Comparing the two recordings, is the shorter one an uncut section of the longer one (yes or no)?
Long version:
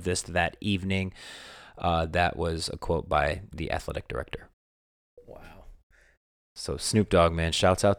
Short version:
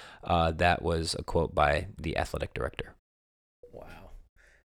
yes